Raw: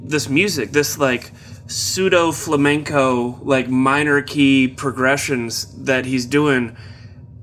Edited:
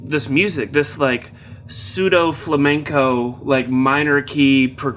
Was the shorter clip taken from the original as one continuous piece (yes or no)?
yes